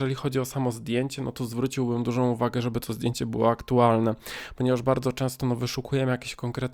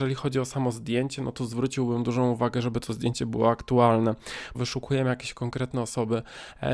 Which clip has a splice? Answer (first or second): second